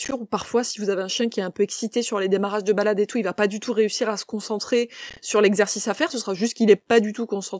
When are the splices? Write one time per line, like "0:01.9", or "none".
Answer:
0:06.1

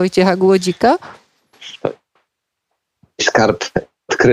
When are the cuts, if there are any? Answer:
none

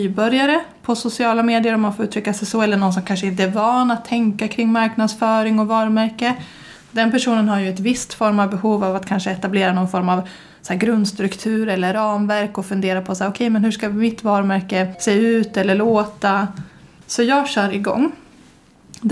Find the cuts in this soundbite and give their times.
0:17.0

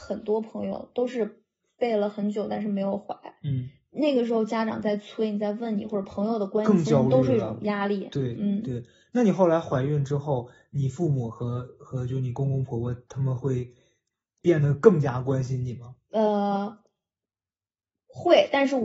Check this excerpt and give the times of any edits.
none

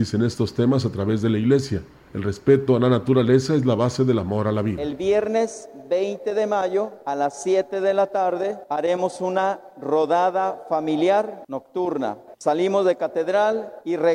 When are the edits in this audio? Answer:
0:12.3

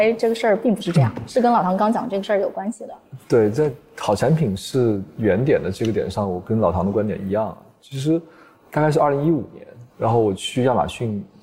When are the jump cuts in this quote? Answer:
none

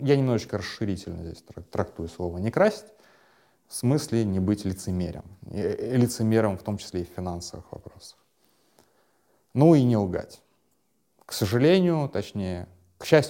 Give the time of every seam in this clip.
none

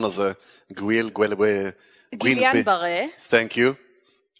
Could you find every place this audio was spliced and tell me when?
0:01.1

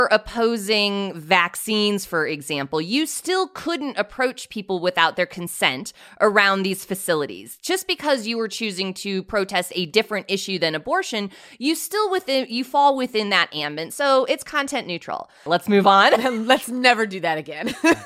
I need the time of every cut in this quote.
0:15.5

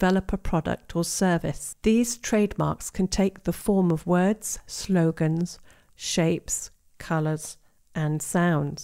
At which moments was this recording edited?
0:05.9

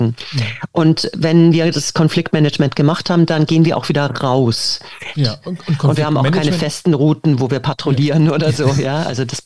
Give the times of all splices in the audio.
0:05.2

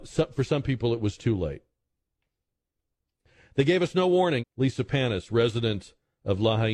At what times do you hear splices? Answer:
0:04.4

